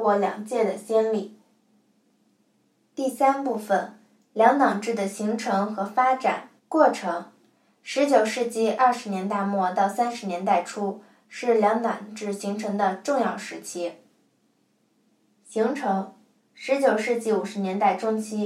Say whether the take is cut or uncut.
cut